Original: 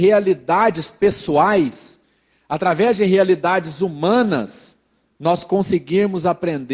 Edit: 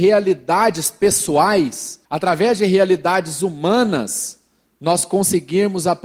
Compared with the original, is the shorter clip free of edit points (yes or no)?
no